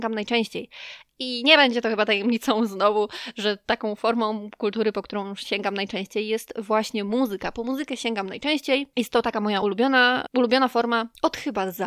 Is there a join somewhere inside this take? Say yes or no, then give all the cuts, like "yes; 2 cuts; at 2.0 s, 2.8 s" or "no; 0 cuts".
no; 0 cuts